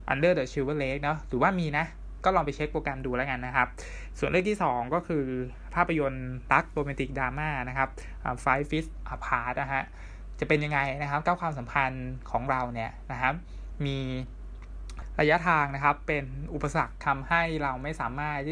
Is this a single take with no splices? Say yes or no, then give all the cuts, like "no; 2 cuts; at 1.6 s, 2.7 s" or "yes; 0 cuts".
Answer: yes; 0 cuts